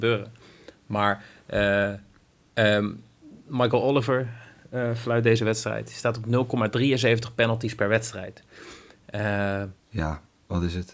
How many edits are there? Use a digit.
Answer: 1